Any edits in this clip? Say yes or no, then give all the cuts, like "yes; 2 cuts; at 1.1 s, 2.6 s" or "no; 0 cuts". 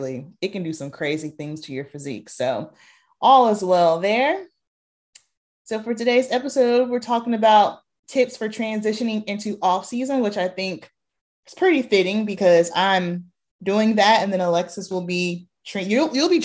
no; 0 cuts